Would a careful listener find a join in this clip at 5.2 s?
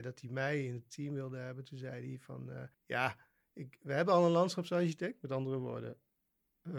no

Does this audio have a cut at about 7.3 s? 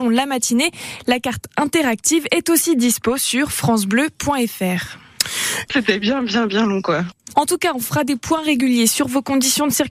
yes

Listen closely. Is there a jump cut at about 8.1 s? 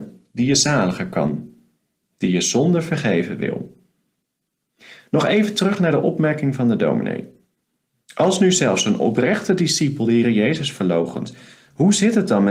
yes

